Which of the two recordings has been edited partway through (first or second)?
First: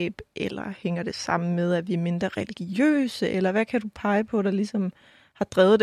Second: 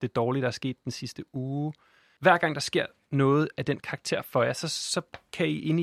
second